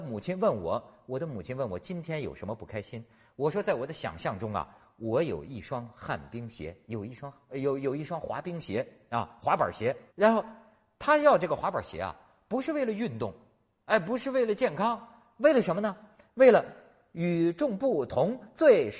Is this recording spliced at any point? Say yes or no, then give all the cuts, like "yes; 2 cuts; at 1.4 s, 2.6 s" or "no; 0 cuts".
yes; 1 cut; at 10.1 s